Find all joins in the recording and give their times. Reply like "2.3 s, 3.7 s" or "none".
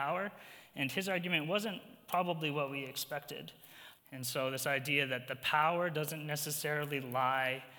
4.0 s